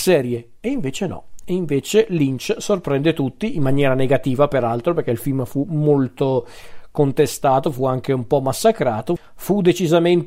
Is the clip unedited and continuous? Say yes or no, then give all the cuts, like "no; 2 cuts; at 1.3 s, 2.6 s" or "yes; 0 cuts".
yes; 0 cuts